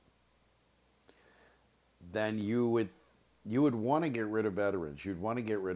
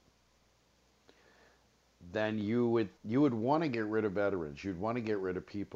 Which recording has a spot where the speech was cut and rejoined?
second; 1 cut; at 3.0 s

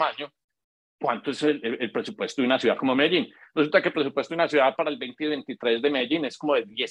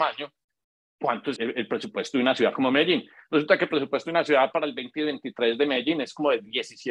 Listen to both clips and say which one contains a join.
second; 1 cut; at 1.4 s

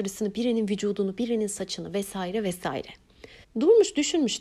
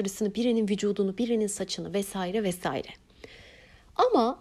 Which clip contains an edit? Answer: first; 1 cut; at 3.4 s

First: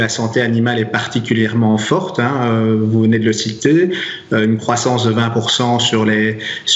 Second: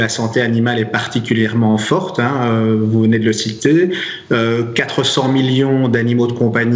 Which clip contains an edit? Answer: first; 1 cut; at 4.3 s

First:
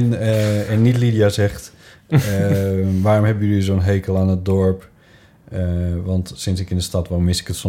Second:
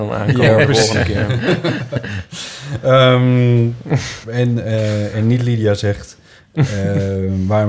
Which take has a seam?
second; 1 cut; at 4.2 s

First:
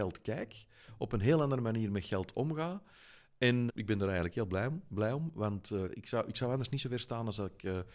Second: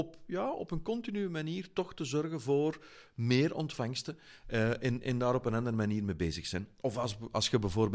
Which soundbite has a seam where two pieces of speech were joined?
first; 2 cuts; at 3.7 s, 5.9 s

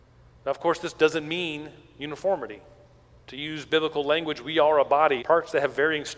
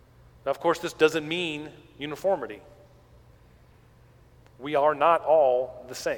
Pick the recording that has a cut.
first; 2 cuts; at 3.2 s, 5.2 s

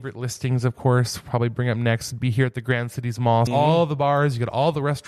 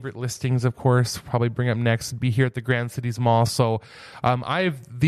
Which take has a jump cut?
first; 1 cut; at 3.5 s

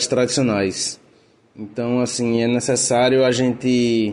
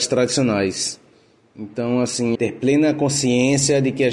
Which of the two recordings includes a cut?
second; 1 cut; at 2.3 s

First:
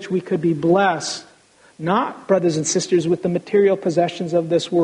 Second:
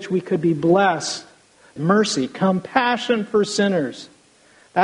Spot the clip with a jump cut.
second; 1 cut; at 1.8 s

